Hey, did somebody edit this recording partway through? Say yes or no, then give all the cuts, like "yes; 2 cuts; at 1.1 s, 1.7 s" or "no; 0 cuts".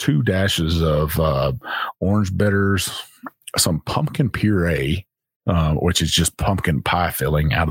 no; 0 cuts